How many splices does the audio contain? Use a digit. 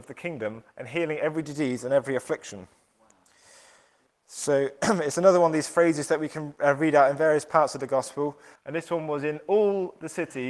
2